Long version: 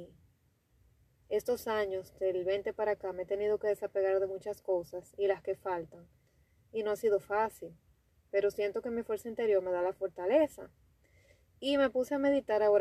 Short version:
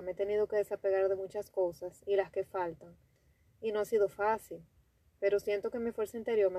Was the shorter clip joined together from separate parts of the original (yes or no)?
no